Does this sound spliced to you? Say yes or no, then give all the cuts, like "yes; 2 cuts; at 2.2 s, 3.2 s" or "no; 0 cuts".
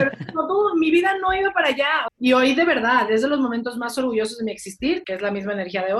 yes; 2 cuts; at 2.1 s, 5.0 s